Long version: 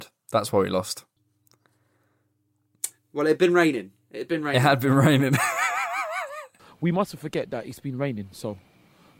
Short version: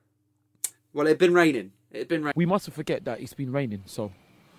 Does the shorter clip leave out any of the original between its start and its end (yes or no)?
yes